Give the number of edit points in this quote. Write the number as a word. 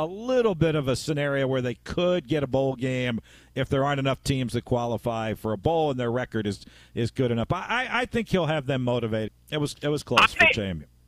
one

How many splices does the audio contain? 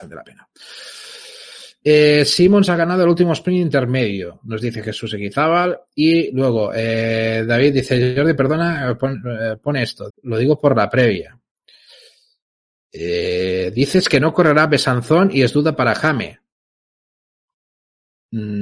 one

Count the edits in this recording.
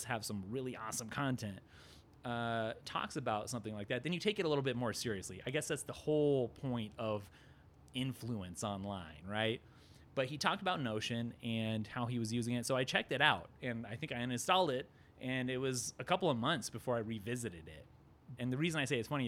two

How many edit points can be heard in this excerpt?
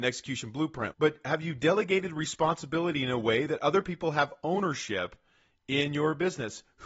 one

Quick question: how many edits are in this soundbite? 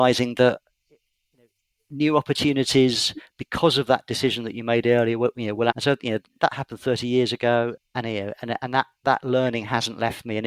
two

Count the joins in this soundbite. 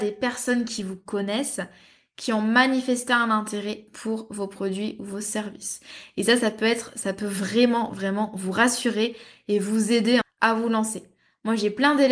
two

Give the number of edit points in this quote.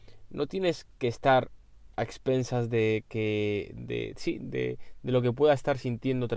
two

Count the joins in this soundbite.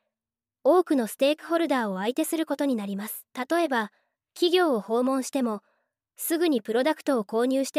one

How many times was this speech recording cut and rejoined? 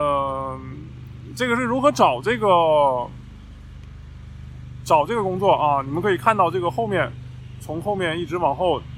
zero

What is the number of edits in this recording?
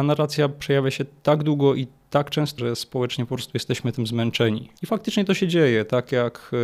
two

